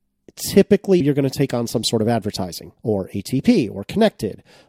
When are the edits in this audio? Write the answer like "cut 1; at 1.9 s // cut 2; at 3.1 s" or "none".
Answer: cut 1; at 1.0 s // cut 2; at 2.8 s